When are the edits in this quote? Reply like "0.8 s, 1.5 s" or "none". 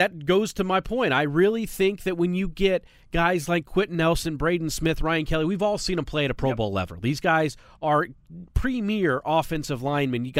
none